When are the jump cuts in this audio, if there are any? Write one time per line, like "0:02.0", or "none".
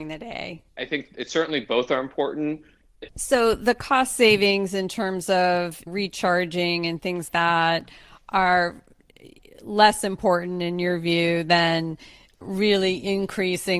0:03.1
0:07.3